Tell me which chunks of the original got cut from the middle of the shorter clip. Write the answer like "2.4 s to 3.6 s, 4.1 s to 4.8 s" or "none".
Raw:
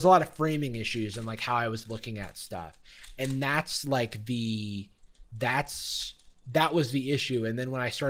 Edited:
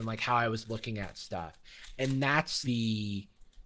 3.8 s to 4.3 s